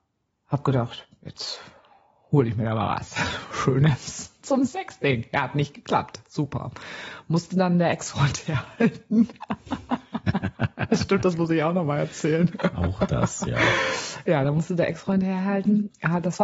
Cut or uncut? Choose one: uncut